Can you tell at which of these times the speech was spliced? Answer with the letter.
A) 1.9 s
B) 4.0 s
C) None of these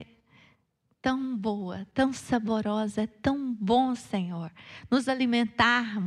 C